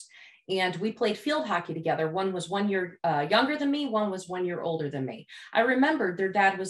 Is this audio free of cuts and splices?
yes; 0 cuts

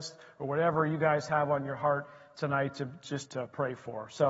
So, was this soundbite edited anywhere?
yes; 1 cut; at 3.3 s

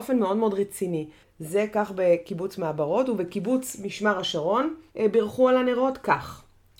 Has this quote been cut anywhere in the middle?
yes; 2 cuts; at 1.2 s, 4.9 s

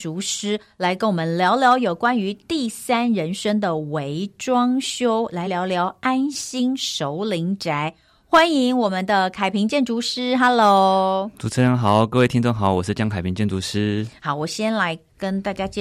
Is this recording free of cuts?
yes; 0 cuts

